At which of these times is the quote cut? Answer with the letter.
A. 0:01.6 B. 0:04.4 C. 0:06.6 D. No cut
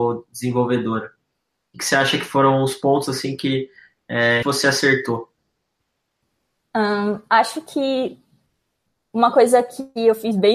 B